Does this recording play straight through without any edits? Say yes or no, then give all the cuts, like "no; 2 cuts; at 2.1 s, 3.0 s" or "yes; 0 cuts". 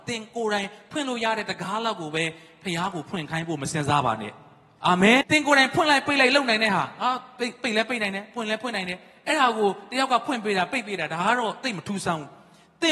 no; 1 cut; at 5.2 s